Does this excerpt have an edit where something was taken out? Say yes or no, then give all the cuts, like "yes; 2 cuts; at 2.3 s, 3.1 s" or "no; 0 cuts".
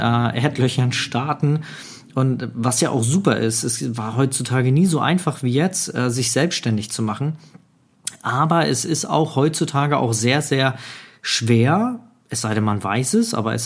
no; 0 cuts